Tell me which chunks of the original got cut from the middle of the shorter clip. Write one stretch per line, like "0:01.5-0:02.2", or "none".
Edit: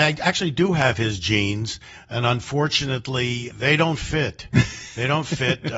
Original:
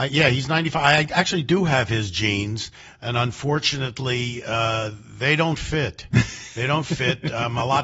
0:04.4-0:05.1